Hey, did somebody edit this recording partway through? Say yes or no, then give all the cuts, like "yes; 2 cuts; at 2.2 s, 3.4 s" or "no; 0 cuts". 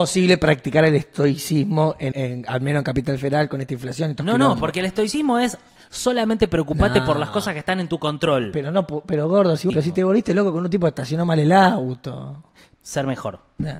yes; 3 cuts; at 2.1 s, 9.7 s, 12.7 s